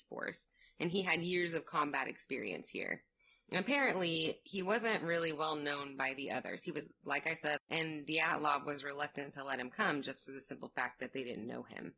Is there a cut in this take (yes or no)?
yes